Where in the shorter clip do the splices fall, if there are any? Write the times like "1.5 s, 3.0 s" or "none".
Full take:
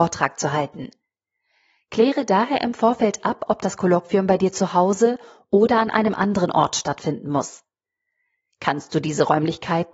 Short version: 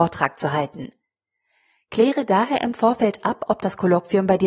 none